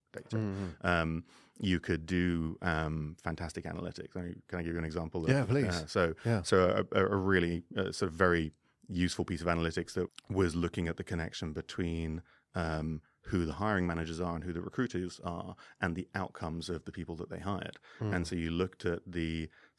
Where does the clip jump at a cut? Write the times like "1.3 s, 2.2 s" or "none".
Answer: 10.1 s